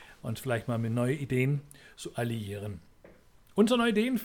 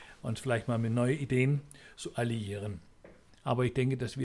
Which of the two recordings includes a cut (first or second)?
second